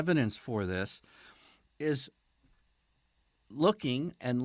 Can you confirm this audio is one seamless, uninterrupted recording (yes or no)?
yes